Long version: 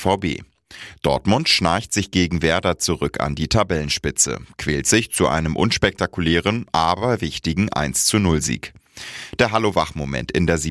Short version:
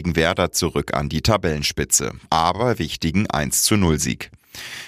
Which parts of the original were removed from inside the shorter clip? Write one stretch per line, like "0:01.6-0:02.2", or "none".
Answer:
0:04.5-0:06.7